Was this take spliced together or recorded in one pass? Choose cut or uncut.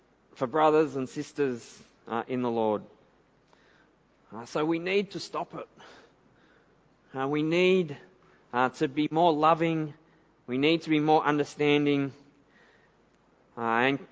uncut